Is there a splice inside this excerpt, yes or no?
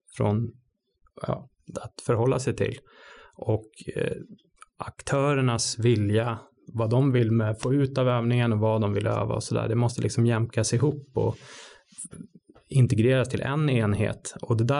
yes